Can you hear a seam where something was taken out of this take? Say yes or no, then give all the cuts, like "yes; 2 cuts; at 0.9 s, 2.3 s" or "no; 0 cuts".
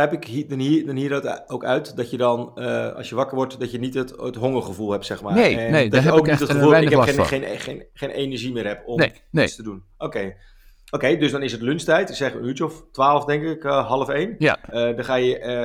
no; 0 cuts